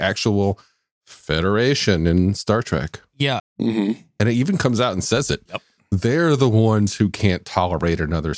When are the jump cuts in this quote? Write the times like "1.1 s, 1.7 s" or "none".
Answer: 3.4 s, 5.5 s